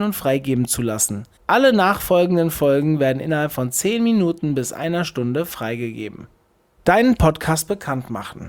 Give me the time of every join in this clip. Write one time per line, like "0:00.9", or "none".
0:01.4

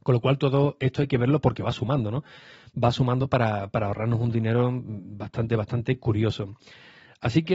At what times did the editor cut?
none

